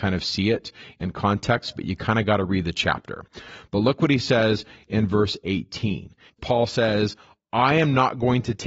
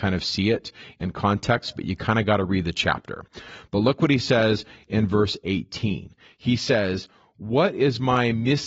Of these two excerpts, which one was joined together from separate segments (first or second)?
first